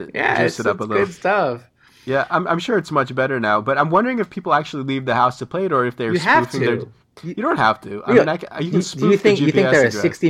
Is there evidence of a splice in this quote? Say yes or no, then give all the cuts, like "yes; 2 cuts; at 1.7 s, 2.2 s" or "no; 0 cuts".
no; 0 cuts